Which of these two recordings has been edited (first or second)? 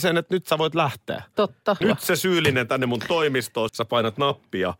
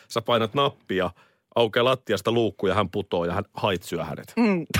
first